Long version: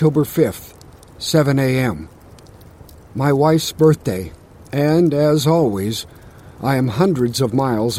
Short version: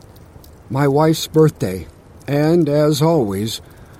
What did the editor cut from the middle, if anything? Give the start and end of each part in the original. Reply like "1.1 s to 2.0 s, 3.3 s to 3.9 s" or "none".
none